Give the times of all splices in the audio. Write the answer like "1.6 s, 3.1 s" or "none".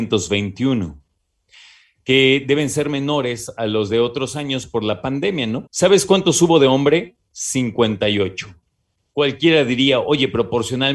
5.7 s